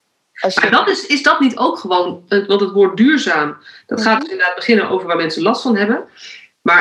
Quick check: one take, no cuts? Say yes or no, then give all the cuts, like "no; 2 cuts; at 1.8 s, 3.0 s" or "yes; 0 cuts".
yes; 0 cuts